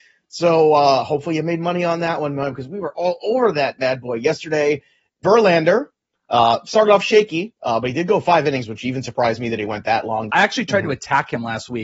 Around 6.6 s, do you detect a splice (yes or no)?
no